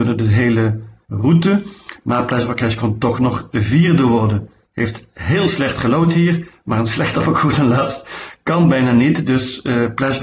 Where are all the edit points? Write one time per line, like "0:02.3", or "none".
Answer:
none